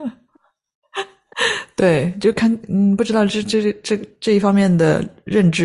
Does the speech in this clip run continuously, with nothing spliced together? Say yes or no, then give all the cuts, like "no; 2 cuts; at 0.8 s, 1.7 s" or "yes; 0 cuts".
yes; 0 cuts